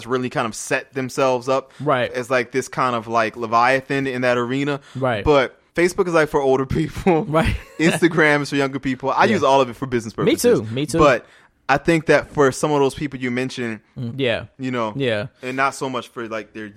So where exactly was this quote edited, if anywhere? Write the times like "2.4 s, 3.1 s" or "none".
5.7 s, 14.1 s